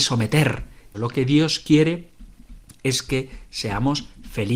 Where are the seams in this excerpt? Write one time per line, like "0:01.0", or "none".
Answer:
0:00.9